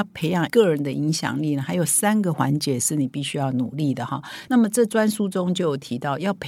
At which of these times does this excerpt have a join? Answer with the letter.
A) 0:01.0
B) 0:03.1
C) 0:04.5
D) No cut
C